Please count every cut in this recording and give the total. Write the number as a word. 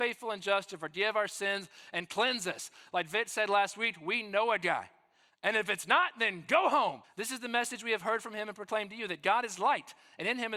two